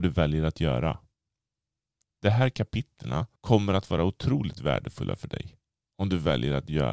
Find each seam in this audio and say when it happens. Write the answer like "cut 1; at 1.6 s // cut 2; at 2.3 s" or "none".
cut 1; at 3.4 s